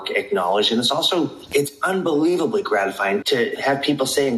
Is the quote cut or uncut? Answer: uncut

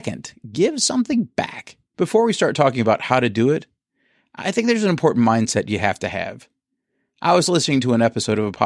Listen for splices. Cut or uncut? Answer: cut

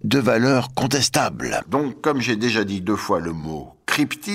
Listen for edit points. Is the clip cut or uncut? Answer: cut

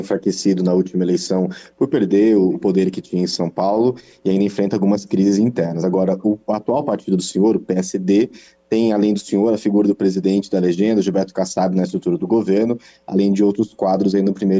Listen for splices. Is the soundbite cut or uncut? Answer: uncut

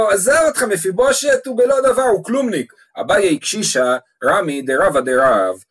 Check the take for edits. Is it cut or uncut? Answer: cut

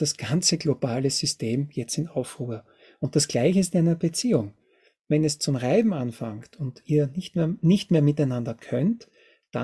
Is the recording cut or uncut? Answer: uncut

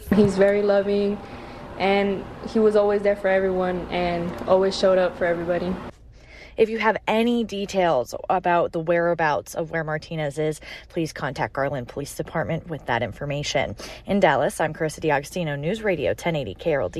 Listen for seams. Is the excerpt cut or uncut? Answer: uncut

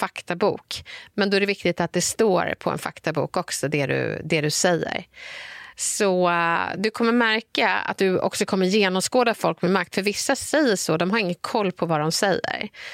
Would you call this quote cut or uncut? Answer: cut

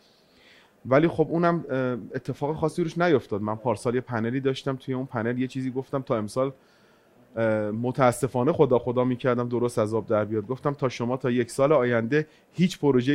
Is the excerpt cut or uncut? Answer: uncut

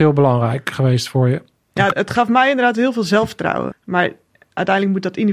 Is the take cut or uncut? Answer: cut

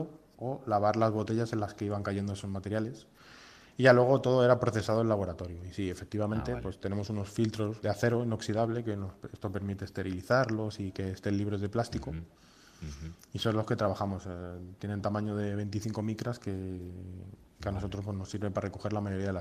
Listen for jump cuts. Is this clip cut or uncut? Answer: cut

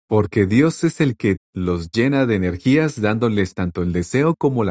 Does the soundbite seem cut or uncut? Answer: cut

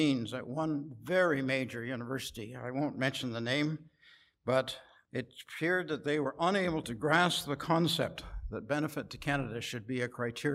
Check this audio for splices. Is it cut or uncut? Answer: uncut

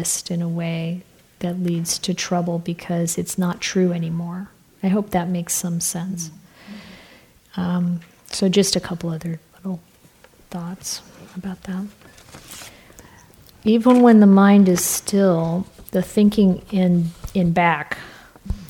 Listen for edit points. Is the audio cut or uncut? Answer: uncut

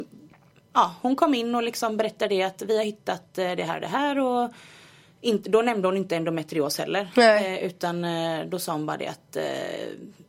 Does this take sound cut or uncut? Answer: uncut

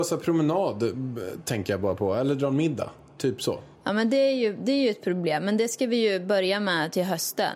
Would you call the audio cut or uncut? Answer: uncut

